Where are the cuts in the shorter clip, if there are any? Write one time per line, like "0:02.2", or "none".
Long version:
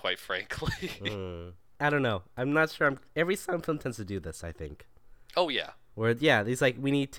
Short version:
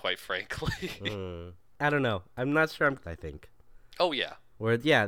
0:03.0